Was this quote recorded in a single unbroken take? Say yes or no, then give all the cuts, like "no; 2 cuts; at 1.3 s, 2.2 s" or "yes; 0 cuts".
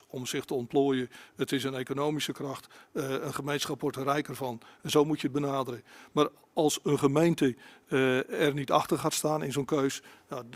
yes; 0 cuts